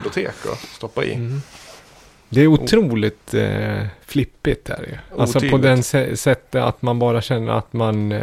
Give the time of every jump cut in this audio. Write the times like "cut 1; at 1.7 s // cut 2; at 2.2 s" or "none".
none